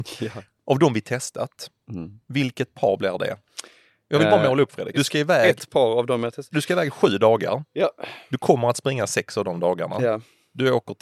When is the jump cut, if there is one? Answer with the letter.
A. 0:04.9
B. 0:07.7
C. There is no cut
A